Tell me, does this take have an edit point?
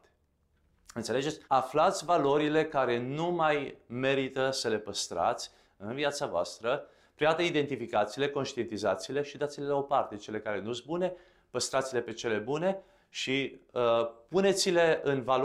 yes; 1 cut; at 1.4 s

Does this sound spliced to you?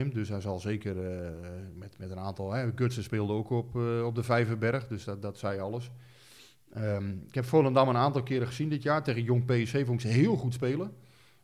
no; 0 cuts

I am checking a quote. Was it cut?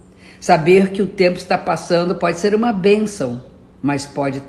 no; 0 cuts

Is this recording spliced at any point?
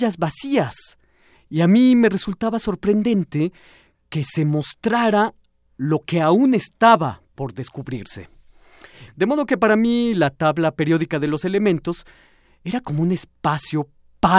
yes; 1 cut; at 9.1 s

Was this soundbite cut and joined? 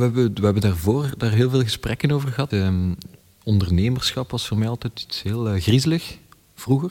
yes; 1 cut; at 2.5 s

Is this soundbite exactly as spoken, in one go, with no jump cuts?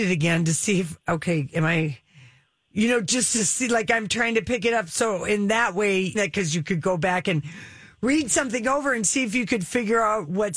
no; 1 cut; at 6.1 s

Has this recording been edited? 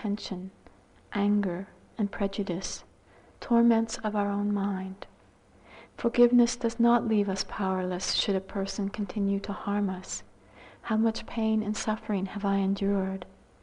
yes; 3 cuts; at 1.9 s, 5.9 s, 10.8 s

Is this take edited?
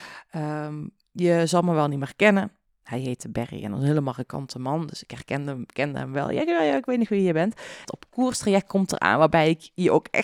yes; 1 cut; at 7.8 s

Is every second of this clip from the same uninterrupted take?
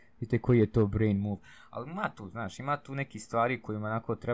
yes; 0 cuts

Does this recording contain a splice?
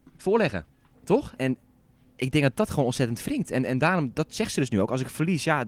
no; 0 cuts

